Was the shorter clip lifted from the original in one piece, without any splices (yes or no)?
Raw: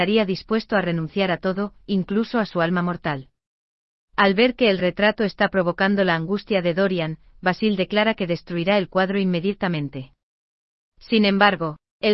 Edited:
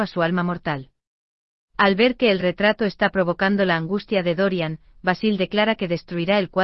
yes